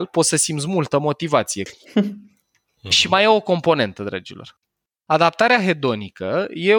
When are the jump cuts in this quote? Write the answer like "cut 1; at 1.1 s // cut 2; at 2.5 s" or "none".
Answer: cut 1; at 1.7 s // cut 2; at 4.9 s